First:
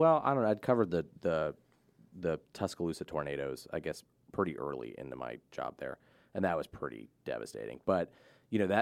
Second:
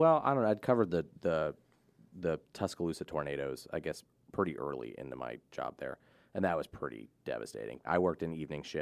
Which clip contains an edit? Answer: second; 1 cut; at 7.8 s

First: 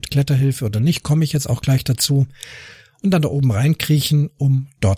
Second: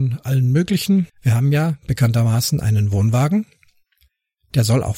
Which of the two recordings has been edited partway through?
second; 1 cut; at 1.1 s

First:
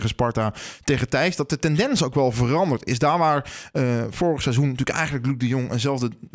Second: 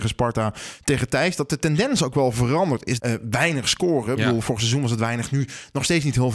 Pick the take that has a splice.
second; 1 cut; at 3.0 s

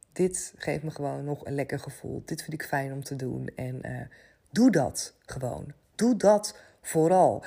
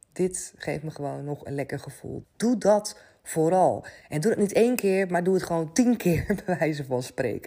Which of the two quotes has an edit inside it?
second; 1 cut; at 2.2 s

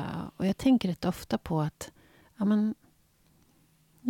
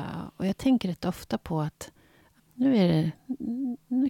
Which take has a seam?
second; 1 cut; at 2.4 s

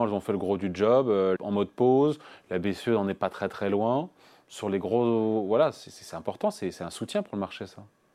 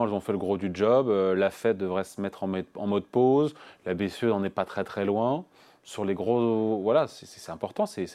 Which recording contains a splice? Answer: first; 1 cut; at 1.4 s

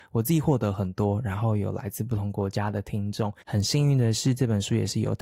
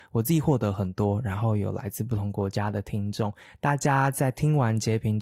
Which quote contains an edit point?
first; 1 cut; at 3.4 s

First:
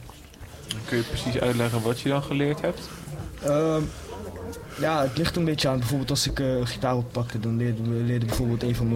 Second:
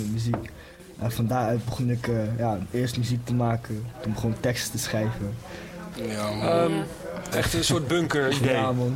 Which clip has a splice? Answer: second; 2 cuts; at 5.9 s, 7.3 s

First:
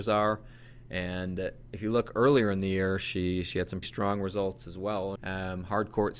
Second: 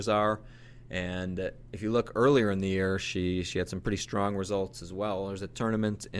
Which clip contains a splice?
first; 2 cuts; at 3.8 s, 5.2 s

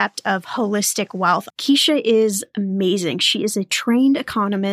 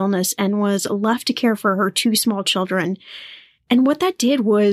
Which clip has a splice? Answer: first; 1 cut; at 1.5 s

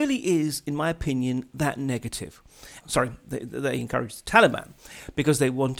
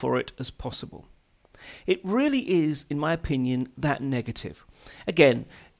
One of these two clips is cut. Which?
first; 1 cut; at 2.8 s

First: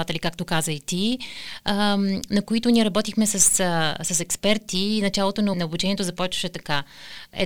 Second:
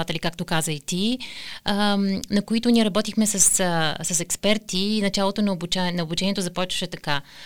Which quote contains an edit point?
first; 1 cut; at 5.5 s

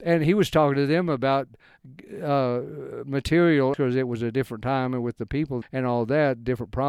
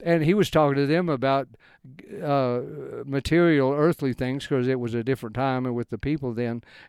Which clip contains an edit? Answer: first; 2 cuts; at 3.7 s, 5.6 s

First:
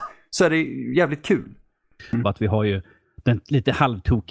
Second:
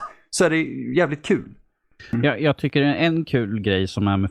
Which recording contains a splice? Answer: first; 1 cut; at 2.2 s

